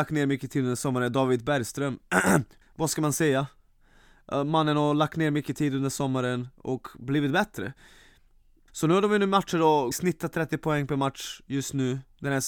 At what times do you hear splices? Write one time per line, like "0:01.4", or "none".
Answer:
0:02.6
0:08.7
0:09.9